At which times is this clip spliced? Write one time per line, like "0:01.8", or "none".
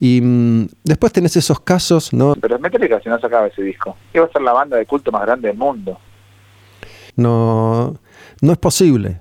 0:02.3
0:07.1